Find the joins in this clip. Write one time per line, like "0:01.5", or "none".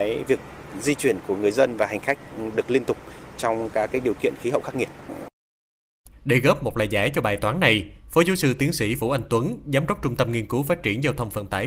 0:06.1